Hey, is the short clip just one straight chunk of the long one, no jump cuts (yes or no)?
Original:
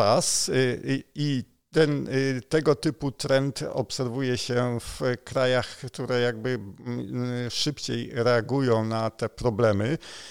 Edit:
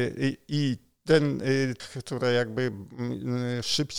no